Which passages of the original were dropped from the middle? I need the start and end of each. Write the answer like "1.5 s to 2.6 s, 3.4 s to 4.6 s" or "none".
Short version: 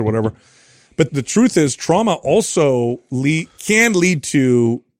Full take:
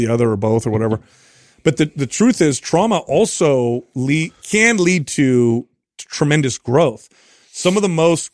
1.8 s to 1.9 s